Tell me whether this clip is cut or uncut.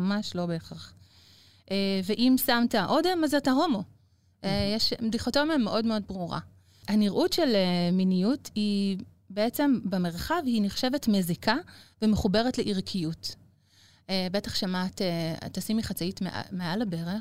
uncut